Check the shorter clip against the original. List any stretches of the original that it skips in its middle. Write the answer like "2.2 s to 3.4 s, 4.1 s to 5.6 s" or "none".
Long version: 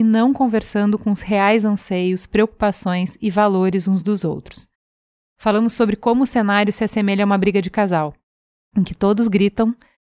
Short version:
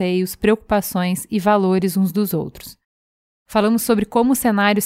none

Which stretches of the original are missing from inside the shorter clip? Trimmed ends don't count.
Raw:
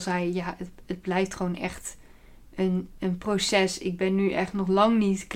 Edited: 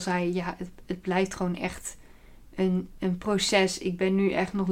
none

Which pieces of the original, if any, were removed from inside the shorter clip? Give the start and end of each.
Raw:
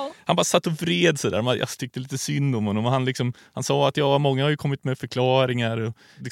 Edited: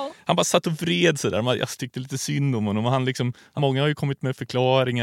3.6 s to 4.2 s

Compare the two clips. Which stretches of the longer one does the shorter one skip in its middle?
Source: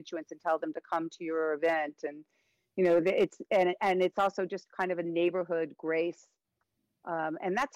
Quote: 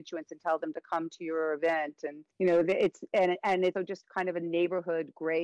2.3 s to 2.7 s, 4.1 s to 4.4 s

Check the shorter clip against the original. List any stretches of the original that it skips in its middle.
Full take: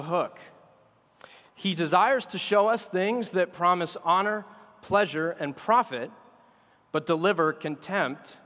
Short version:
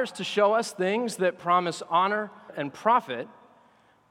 4.6 s to 5.3 s

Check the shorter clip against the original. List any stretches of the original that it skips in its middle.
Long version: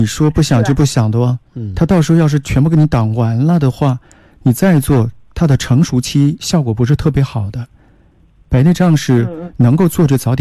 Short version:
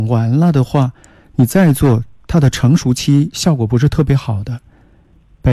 none

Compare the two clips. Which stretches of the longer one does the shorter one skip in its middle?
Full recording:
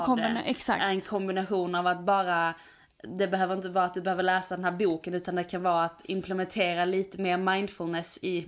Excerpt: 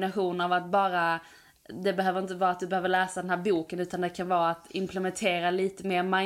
none

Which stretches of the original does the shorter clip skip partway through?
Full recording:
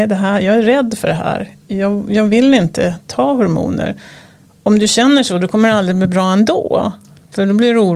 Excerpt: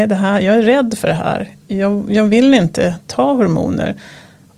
none

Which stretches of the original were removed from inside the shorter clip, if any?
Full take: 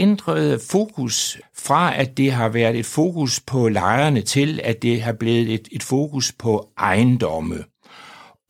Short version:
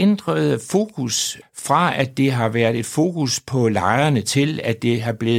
none

